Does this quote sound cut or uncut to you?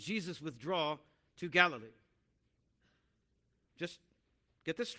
cut